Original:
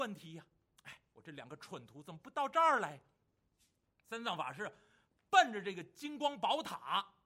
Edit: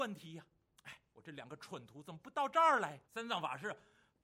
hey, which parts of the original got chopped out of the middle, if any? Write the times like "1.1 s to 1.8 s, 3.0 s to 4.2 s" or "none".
3.0 s to 4.0 s